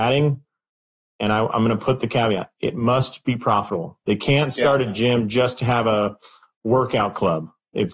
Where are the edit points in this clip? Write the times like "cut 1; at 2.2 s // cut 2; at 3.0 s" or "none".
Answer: none